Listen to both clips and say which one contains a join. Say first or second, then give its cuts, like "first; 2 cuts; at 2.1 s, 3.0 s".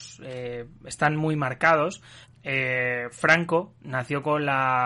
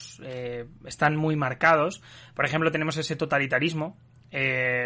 first; 1 cut; at 2.2 s